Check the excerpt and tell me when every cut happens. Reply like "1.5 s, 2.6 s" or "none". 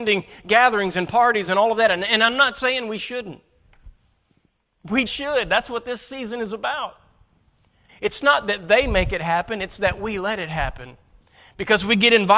5.1 s, 7.9 s